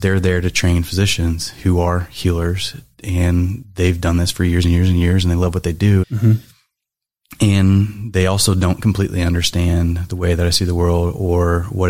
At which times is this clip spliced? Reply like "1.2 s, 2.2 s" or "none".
6.0 s